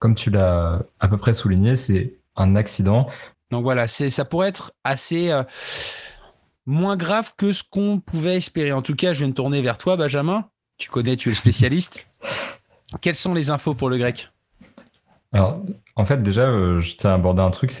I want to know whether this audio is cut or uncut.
cut